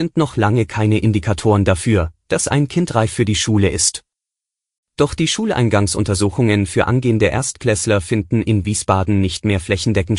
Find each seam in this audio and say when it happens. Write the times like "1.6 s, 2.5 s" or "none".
none